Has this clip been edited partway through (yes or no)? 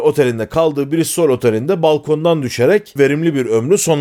no